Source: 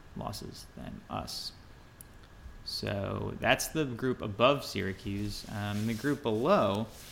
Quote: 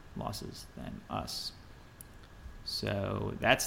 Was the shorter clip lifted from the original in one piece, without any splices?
yes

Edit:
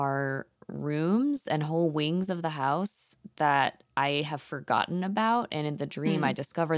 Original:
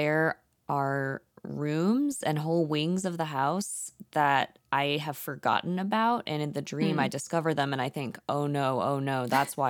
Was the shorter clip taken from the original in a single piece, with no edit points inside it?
yes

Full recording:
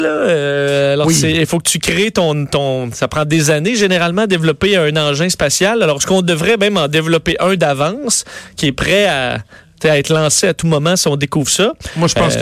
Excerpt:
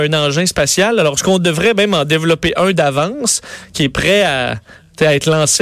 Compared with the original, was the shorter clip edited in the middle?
no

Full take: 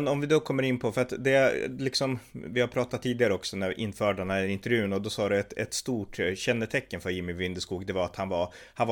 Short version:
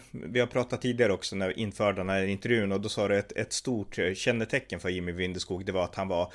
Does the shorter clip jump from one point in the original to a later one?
no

